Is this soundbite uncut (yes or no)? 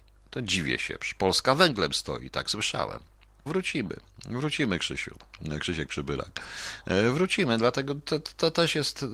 no